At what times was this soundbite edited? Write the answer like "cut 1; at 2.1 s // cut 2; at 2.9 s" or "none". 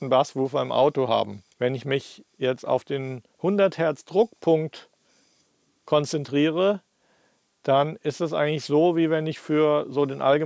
cut 1; at 1.5 s